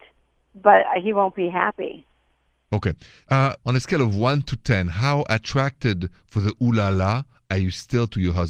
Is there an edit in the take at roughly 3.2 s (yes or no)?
no